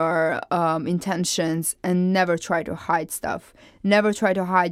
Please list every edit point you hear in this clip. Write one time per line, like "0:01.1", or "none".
none